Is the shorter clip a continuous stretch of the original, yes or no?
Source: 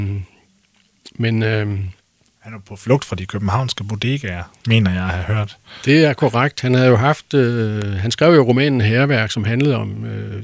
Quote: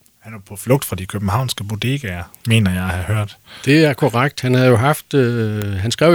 yes